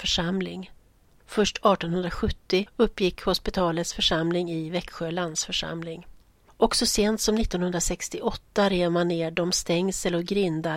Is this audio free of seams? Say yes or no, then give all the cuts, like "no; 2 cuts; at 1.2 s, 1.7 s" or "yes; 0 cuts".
yes; 0 cuts